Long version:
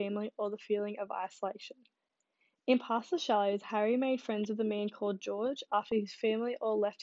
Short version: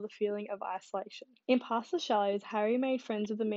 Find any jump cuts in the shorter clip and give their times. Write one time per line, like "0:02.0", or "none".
0:01.4